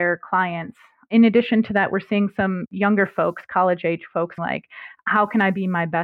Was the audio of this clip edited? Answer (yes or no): yes